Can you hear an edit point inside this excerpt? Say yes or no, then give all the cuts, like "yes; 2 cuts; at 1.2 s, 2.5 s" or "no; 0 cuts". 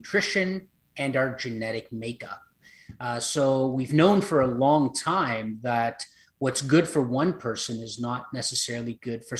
no; 0 cuts